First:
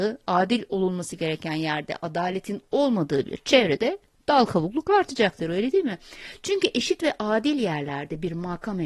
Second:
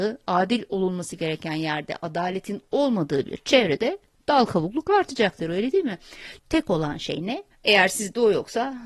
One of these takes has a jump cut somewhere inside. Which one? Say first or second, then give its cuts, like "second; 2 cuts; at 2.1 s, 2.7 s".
second; 2 cuts; at 6.4 s, 7.5 s